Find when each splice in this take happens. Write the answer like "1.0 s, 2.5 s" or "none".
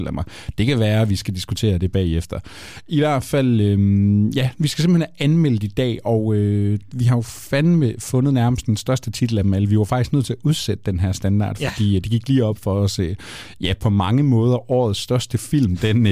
none

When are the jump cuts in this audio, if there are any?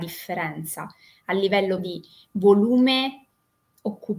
1.8 s

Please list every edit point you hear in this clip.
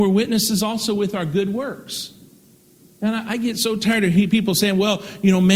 none

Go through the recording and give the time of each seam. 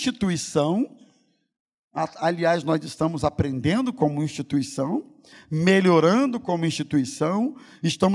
5.3 s

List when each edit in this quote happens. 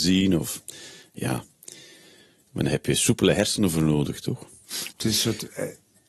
4.9 s

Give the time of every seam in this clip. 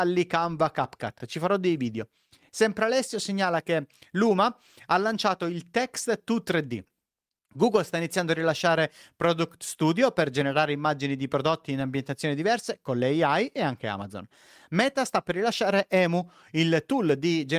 none

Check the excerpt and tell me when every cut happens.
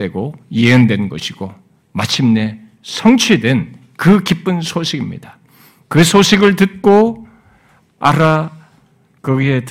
none

